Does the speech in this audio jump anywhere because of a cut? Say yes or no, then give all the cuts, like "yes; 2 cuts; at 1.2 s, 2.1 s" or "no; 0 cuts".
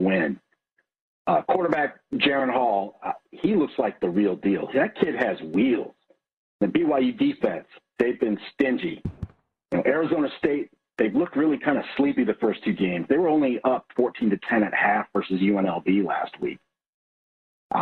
no; 0 cuts